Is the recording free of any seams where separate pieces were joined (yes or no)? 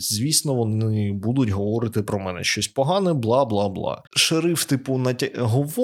no